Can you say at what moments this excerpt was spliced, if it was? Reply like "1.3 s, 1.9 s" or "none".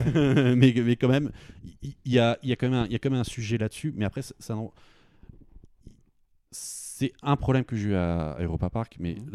none